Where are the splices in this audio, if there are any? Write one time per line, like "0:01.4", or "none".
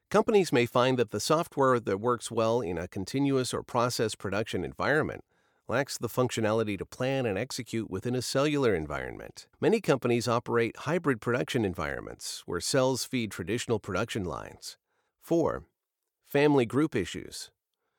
0:09.5
0:15.1